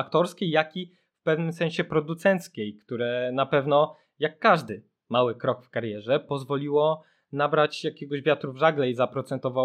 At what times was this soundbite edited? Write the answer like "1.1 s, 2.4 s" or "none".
none

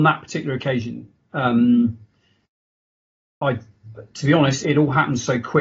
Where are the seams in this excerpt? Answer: 3.4 s, 4.6 s

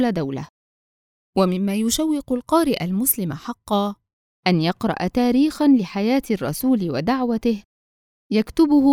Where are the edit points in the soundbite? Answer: none

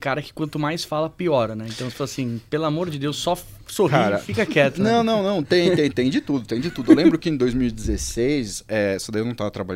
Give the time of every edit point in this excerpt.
none

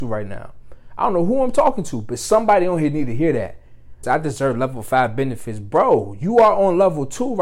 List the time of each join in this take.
4.0 s

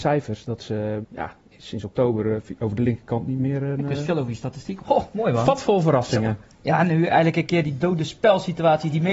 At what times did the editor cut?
1.0 s, 4.8 s

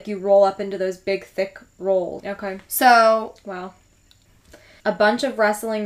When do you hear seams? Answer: 2.2 s, 4.8 s

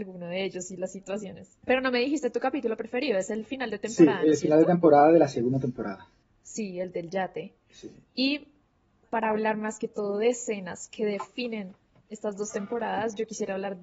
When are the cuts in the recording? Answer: 1.6 s, 9.0 s

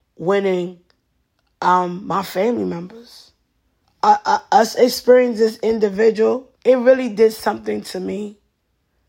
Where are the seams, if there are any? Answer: 3.8 s, 6.5 s

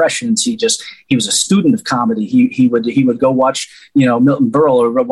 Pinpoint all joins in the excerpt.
none

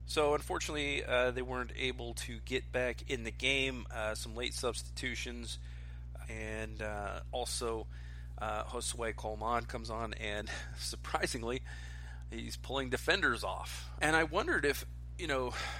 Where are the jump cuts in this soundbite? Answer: 6.2 s, 14.0 s

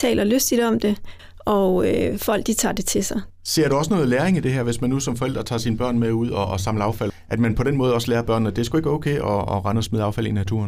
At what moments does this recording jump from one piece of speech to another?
3.3 s

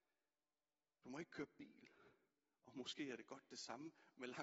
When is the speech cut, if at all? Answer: none

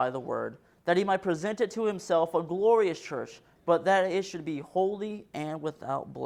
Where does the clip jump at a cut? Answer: 3.6 s

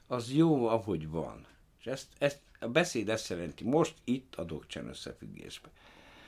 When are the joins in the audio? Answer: none

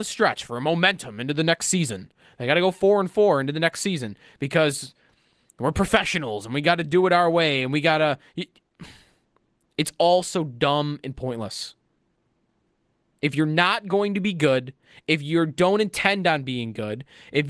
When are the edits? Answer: none

